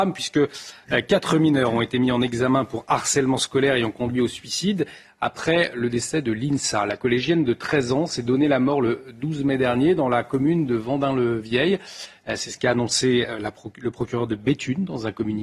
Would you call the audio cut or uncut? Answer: uncut